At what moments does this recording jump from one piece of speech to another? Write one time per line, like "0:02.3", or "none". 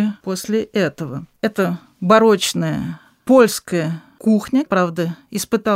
0:04.7